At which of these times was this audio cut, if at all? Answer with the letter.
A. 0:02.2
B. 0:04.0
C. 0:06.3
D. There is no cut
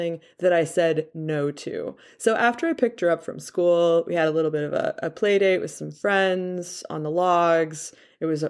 D